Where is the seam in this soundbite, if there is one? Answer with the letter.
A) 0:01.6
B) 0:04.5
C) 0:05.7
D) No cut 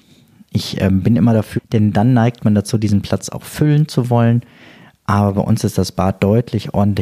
A